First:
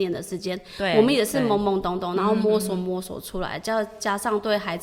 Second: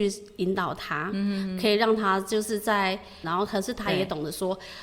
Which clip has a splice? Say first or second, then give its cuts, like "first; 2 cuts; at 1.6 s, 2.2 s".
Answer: second; 1 cut; at 3.2 s